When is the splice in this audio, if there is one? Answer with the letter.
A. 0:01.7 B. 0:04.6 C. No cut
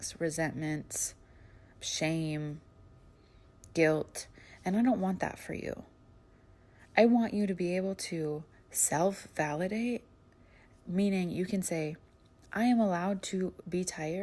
A